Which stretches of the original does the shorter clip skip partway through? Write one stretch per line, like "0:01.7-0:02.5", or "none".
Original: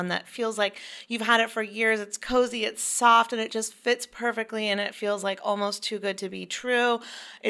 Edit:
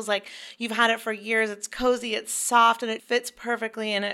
0:03.5-0:03.7